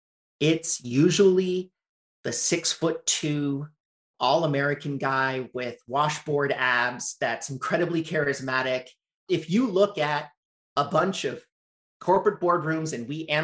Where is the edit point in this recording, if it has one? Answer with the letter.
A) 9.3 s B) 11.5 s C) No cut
A